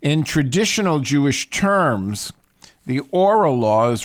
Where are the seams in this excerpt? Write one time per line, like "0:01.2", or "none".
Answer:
none